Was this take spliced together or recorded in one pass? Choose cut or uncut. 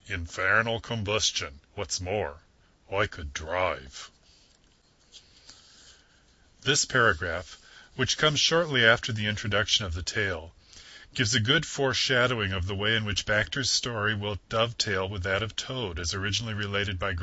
cut